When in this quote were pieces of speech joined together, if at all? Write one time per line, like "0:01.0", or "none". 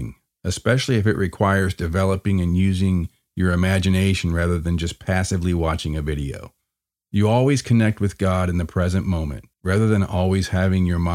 0:07.0
0:09.5